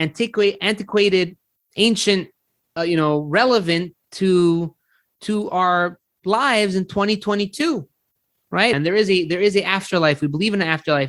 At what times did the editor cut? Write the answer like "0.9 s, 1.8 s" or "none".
2.8 s, 8.7 s